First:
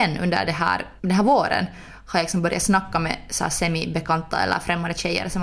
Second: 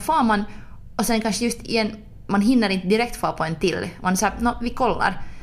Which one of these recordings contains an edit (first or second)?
first